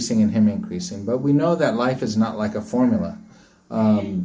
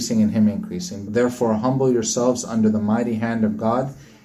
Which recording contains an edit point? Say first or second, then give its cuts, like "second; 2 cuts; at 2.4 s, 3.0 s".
second; 1 cut; at 1.0 s